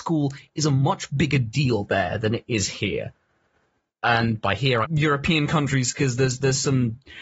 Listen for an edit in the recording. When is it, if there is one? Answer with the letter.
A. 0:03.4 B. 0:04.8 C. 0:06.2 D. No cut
B